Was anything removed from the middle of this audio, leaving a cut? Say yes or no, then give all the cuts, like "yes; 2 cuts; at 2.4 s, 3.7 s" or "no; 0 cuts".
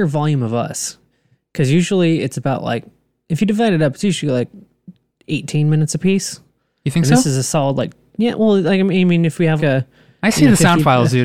yes; 1 cut; at 9.6 s